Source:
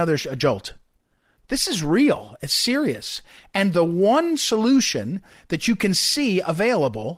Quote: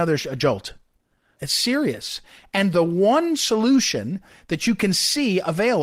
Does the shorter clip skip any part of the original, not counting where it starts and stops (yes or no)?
yes